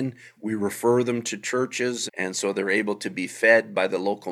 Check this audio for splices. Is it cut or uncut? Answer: cut